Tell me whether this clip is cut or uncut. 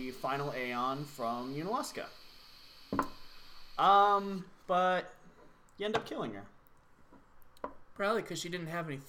uncut